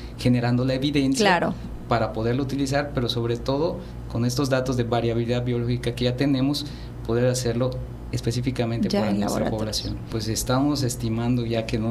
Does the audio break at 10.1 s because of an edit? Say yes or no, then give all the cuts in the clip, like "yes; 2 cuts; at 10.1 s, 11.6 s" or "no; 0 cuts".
yes; 1 cut; at 10.1 s